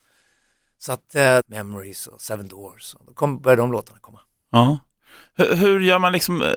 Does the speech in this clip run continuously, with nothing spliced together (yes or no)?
no